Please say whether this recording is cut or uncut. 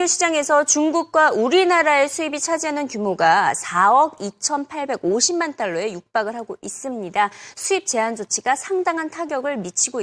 uncut